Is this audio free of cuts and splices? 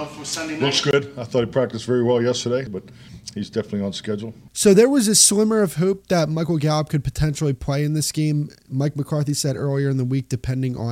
no; 2 cuts; at 2.7 s, 4.5 s

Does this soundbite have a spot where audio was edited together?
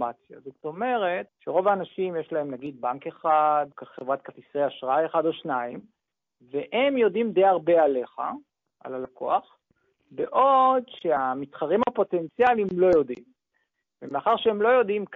yes; 2 cuts; at 1.3 s, 3.7 s

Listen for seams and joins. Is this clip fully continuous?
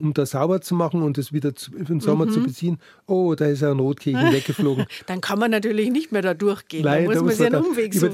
yes; 0 cuts

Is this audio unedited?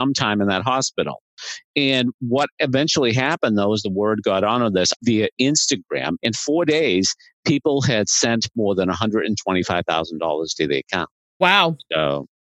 no; 2 cuts; at 5.0 s, 6.2 s

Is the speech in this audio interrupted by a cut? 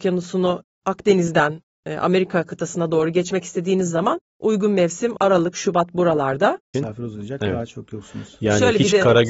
yes; 2 cuts; at 5.5 s, 6.7 s

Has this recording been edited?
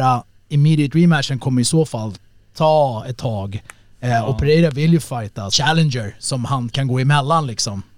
yes; 1 cut; at 5.5 s

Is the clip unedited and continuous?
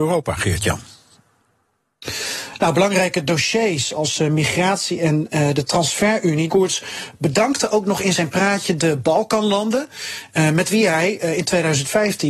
no; 1 cut; at 6.5 s

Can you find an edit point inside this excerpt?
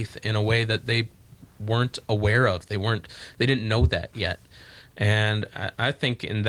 no; 0 cuts

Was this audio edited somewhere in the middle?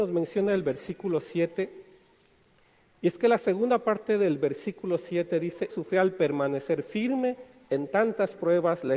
yes; 1 cut; at 5.7 s

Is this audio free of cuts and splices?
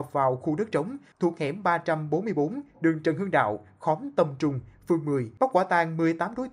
yes; 0 cuts

